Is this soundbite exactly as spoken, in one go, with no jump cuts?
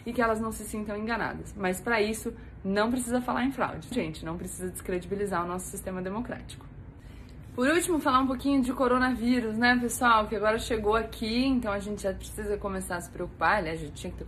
no; 1 cut; at 3.9 s

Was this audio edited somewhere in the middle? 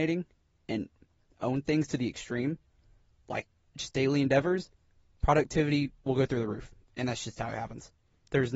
no; 0 cuts

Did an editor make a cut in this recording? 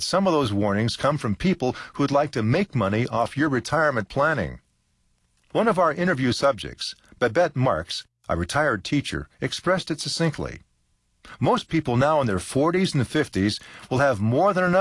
no; 0 cuts

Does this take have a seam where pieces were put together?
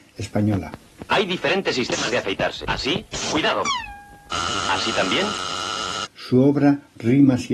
yes; 1 cut; at 6.1 s

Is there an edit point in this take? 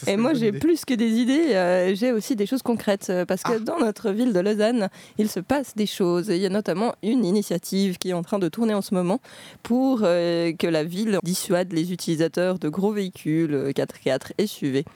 yes; 1 cut; at 11.2 s

